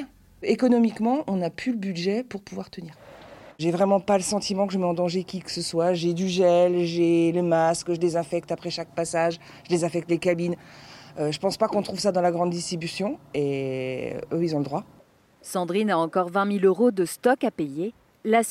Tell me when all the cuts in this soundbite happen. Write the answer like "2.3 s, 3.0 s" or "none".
3.5 s